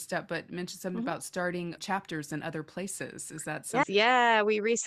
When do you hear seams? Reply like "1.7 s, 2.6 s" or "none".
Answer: 1.8 s, 3.8 s

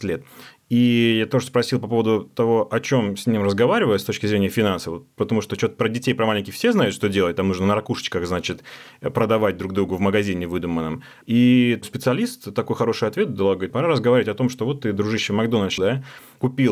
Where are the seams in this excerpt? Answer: 11.2 s, 13.7 s, 15.8 s

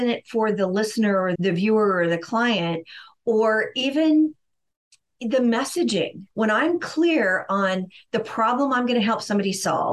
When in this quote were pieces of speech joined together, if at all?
1.4 s, 6.3 s

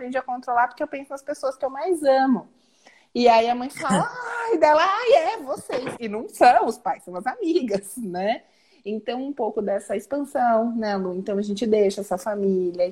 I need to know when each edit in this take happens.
none

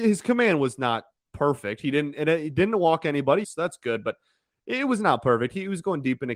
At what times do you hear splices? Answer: 3.4 s

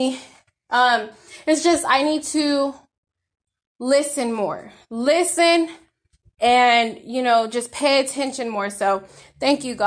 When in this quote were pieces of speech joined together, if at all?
none

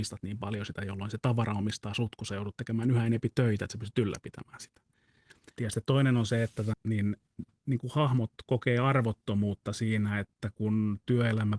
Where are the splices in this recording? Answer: 5.6 s, 6.7 s

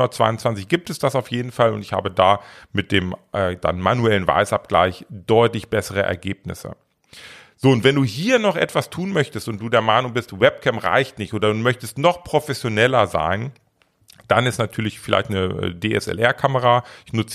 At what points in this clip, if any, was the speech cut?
none

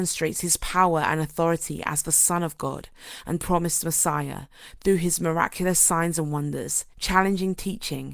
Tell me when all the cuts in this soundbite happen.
6.9 s

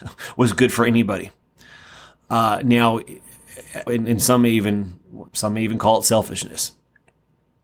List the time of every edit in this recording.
3.9 s, 5.3 s

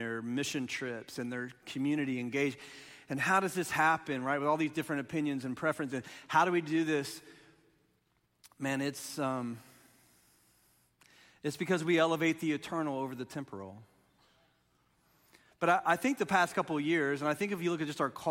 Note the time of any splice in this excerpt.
none

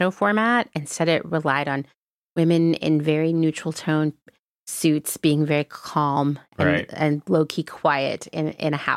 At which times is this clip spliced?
none

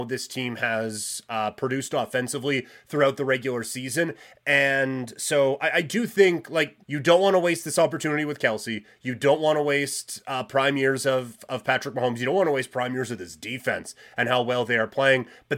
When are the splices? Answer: 6.8 s

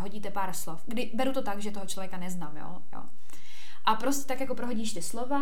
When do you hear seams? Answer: none

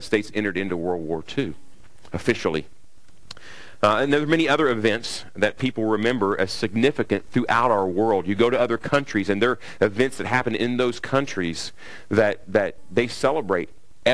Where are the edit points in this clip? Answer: none

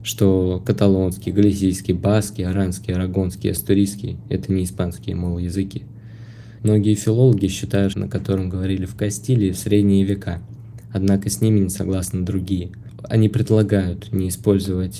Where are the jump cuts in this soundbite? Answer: 6.6 s, 7.9 s

